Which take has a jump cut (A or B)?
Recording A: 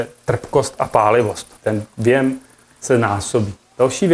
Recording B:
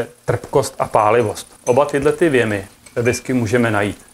A